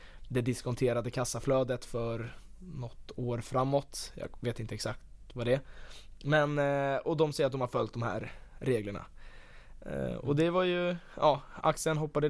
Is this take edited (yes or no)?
no